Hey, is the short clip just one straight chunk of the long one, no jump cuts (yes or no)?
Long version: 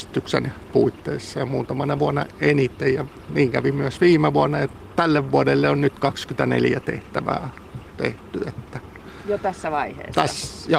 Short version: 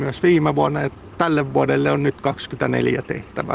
yes